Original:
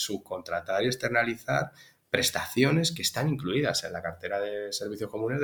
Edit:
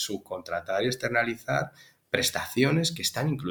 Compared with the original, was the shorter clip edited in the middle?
no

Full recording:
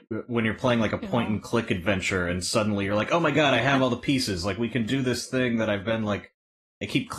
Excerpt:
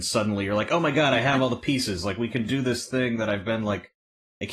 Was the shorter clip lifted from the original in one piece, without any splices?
yes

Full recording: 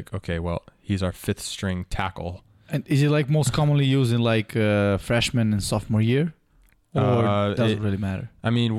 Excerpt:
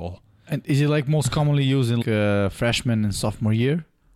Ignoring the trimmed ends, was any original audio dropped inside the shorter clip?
yes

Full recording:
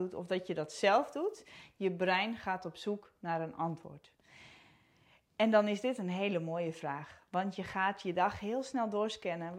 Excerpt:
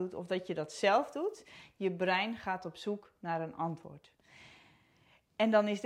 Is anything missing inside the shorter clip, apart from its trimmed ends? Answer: no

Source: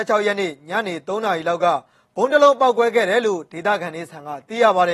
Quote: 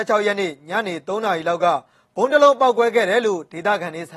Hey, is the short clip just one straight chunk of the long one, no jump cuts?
yes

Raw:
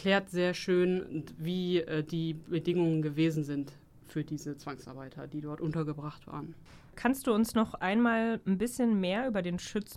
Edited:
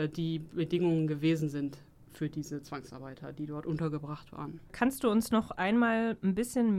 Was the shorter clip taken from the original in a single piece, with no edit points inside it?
no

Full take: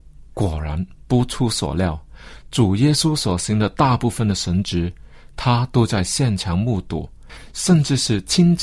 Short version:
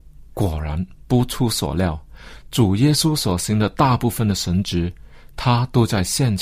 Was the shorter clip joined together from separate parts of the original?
no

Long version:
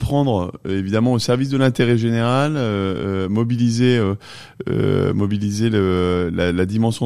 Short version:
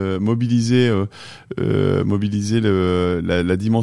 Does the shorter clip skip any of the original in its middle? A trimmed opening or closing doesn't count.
no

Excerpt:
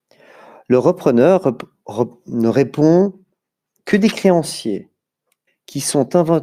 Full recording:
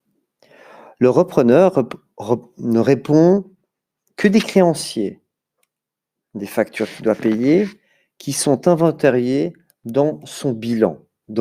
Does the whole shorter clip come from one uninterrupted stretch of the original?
no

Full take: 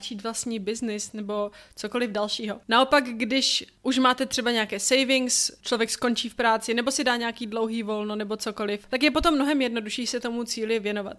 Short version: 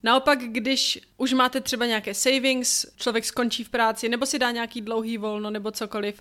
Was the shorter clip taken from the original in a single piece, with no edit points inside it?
yes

